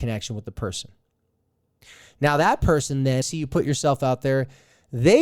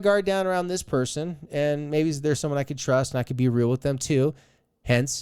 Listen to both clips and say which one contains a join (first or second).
first